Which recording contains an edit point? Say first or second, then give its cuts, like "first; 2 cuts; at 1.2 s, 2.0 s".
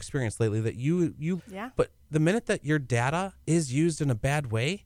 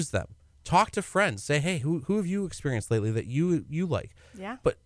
first; 2 cuts; at 1.4 s, 3.4 s